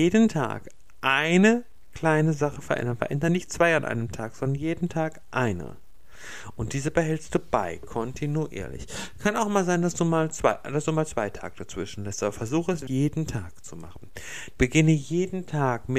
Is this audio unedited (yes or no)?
no